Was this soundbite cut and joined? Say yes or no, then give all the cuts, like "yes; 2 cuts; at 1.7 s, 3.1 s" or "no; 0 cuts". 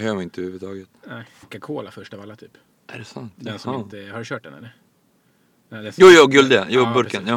yes; 1 cut; at 1.4 s